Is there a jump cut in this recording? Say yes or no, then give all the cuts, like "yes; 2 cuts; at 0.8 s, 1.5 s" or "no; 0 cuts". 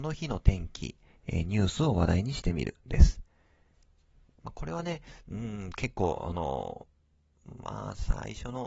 no; 0 cuts